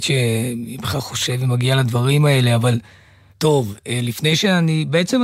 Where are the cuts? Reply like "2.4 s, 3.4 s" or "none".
3.3 s